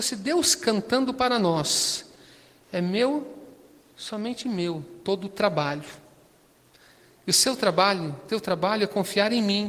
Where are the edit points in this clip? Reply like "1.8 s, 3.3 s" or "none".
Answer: none